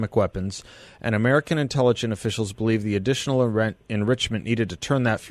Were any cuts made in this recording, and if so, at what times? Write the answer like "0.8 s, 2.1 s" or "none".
none